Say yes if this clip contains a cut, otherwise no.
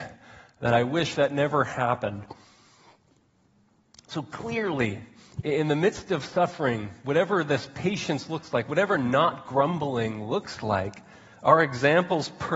no